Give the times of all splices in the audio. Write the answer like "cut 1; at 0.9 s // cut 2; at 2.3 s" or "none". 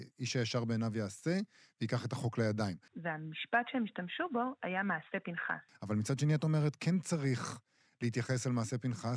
cut 1; at 2.9 s // cut 2; at 5.7 s